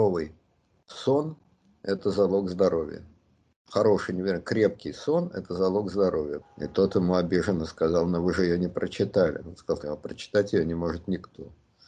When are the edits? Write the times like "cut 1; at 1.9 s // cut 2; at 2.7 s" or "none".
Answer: cut 1; at 6.4 s // cut 2; at 9.8 s